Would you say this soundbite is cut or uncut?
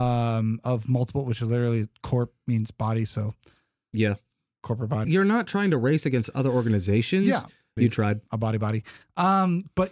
cut